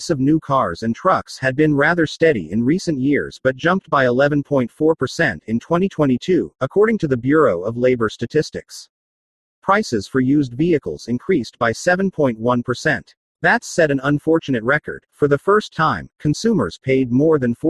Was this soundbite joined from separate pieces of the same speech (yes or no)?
no